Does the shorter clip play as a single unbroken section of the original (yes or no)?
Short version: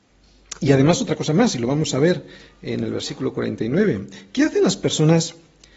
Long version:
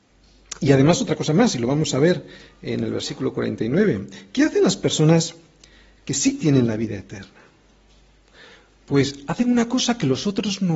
yes